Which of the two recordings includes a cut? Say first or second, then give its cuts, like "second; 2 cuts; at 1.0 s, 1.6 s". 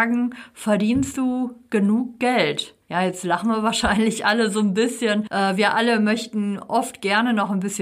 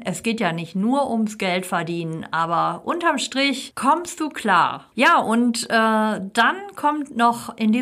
second; 1 cut; at 4.9 s